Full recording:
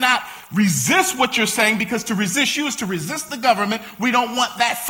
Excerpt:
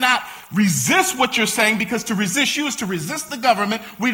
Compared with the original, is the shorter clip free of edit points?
yes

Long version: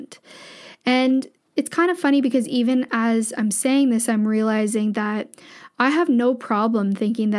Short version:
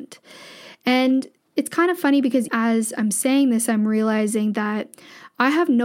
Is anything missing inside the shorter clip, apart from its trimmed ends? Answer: yes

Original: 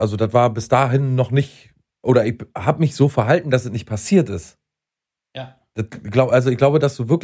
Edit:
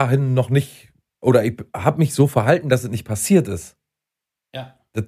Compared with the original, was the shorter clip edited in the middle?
no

